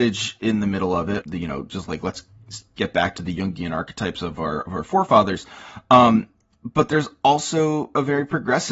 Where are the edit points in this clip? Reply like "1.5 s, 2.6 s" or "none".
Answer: 1.2 s